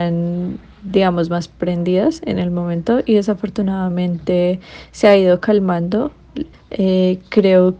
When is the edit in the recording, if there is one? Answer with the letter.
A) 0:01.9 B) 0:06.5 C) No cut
B